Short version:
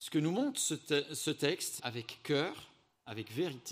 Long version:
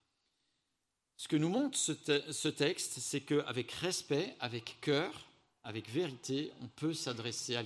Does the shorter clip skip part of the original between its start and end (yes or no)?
yes